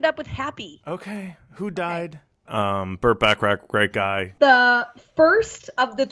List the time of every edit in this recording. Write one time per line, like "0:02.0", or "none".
0:02.5
0:04.4